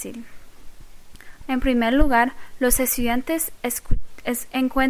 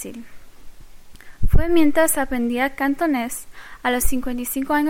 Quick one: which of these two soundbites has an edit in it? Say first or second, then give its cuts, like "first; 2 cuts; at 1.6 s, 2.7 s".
first; 1 cut; at 1.4 s